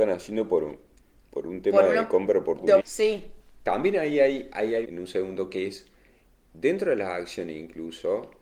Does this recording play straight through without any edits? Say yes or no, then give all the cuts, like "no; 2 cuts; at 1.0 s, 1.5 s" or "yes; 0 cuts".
no; 2 cuts; at 2.8 s, 4.8 s